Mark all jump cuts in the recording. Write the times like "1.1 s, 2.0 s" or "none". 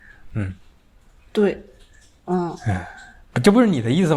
none